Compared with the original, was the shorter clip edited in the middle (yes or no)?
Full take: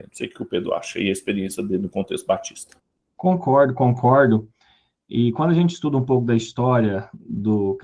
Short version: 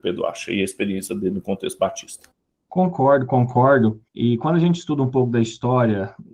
yes